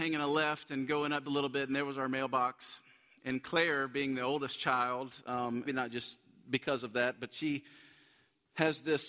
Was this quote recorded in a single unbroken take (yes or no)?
no